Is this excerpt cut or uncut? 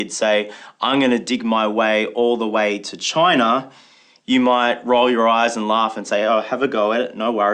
uncut